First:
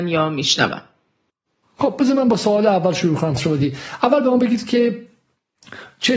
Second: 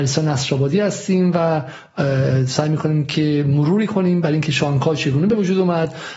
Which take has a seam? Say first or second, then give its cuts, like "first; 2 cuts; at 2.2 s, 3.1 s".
first; 1 cut; at 3.4 s